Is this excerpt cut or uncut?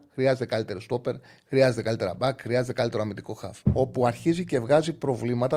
cut